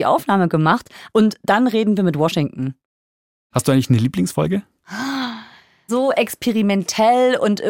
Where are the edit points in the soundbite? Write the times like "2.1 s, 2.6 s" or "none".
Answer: 5.9 s